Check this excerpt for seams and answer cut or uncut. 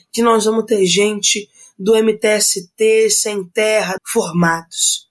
cut